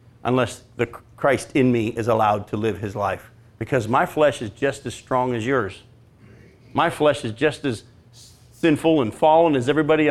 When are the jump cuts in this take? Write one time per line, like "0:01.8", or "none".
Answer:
none